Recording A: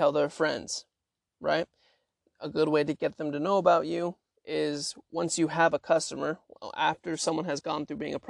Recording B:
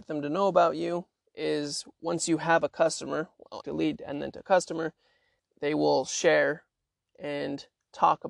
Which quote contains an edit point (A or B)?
B